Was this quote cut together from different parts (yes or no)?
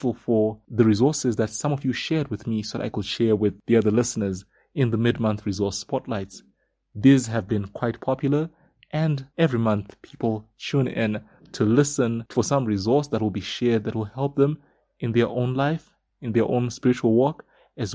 no